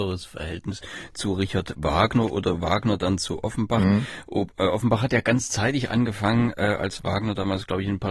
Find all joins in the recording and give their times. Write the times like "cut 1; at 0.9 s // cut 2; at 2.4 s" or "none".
none